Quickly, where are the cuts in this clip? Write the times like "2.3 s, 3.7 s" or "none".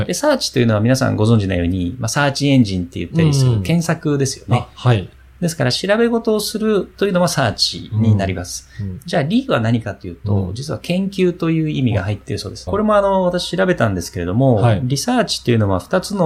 12.7 s